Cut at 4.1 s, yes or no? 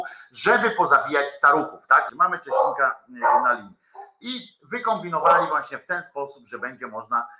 no